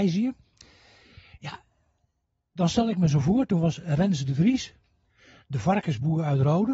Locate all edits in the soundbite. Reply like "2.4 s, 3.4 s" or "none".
none